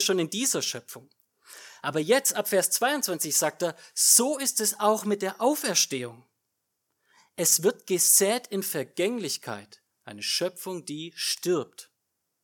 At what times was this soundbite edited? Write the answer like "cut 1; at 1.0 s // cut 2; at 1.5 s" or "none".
none